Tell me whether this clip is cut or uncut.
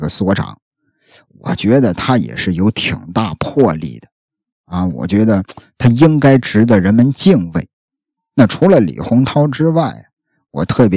cut